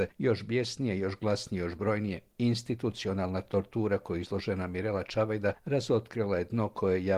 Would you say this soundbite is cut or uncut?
uncut